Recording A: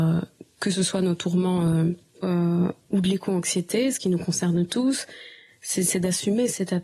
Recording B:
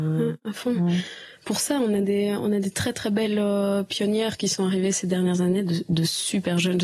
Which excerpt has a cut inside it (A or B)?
A